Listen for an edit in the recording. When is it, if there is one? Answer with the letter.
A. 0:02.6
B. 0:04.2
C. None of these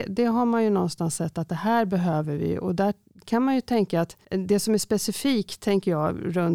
B